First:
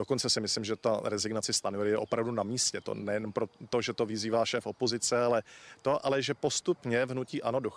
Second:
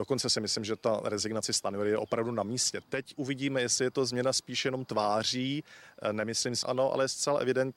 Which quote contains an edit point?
second; 2 cuts; at 2.8 s, 6.6 s

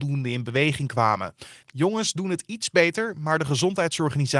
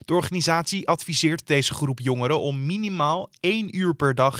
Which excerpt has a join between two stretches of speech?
first; 1 cut; at 1.6 s

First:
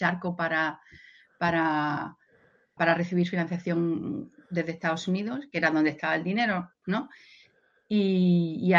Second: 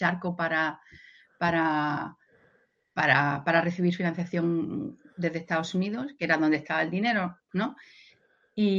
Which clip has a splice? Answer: first; 1 cut; at 2.8 s

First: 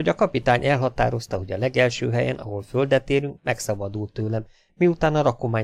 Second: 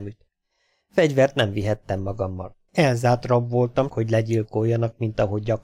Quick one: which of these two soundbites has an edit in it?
second; 2 cuts; at 2.7 s, 3.9 s

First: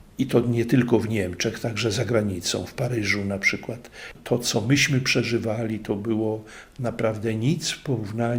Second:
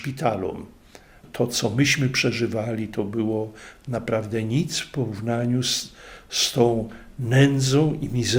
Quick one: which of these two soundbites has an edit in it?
first; 1 cut; at 4.1 s

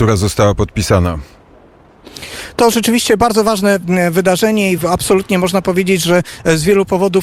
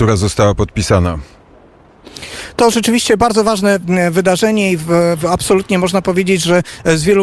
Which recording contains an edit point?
first; 1 cut; at 4.8 s

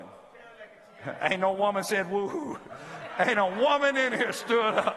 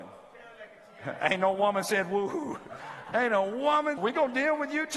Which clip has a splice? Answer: second; 2 cuts; at 2.8 s, 4.0 s

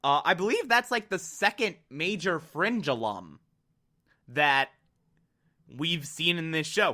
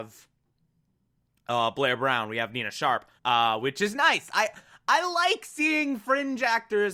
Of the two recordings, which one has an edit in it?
second; 1 cut; at 3.2 s

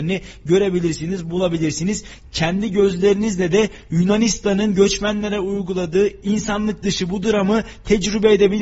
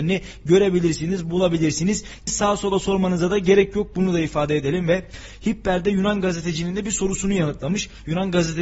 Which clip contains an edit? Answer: second; 1 cut; at 2.3 s

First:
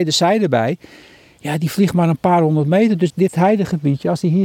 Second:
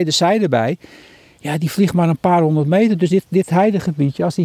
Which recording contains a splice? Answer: first; 1 cut; at 3.1 s

